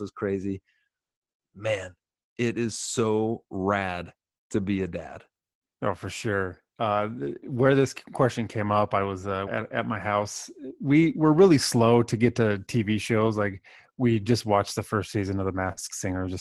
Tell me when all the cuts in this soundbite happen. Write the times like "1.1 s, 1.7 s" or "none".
9.5 s